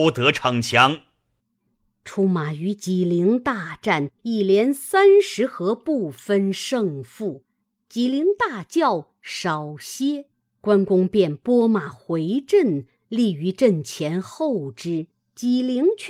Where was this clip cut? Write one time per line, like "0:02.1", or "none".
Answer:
none